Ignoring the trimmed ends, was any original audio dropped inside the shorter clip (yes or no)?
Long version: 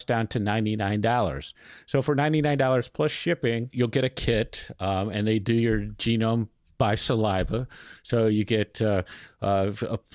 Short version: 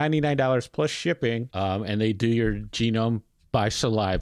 yes